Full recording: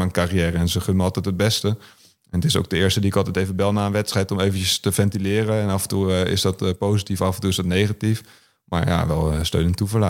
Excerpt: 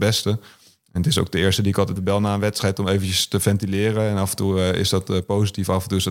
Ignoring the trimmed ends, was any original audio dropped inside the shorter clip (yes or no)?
yes